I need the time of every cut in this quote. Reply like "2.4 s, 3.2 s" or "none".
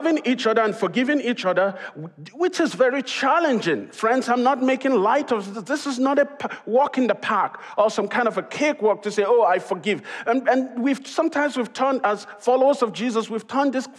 none